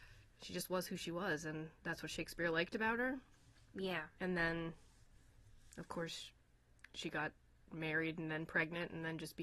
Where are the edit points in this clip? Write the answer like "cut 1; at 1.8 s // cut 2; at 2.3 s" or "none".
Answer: none